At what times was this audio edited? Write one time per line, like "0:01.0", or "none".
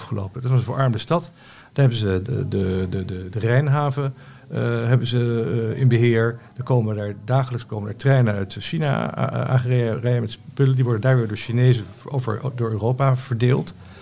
none